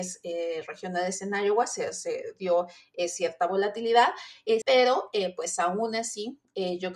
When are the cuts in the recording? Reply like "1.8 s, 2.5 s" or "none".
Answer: 4.6 s